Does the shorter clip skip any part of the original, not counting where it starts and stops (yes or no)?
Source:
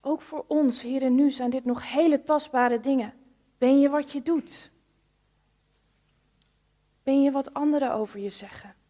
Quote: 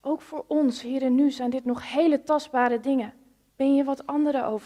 yes